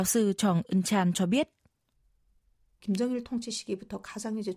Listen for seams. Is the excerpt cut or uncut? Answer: uncut